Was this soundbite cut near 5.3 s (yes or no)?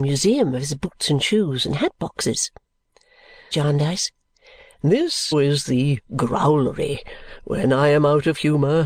yes